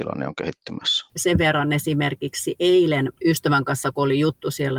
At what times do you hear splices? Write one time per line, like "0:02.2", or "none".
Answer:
0:01.1
0:03.2